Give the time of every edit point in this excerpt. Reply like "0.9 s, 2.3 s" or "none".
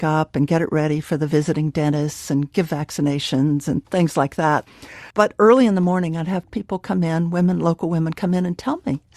5.1 s